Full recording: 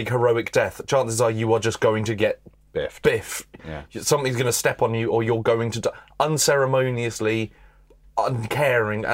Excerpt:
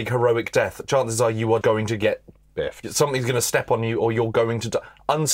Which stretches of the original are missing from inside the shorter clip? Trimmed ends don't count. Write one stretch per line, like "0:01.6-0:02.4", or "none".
0:01.6-0:01.8
0:03.0-0:03.9